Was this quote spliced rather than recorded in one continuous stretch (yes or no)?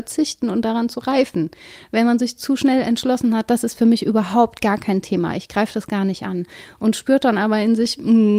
no